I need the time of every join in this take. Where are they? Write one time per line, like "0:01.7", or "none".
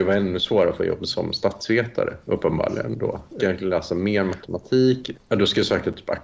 0:03.4
0:05.1